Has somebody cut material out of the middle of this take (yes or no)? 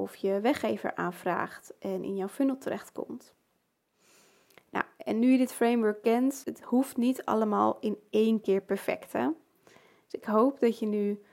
yes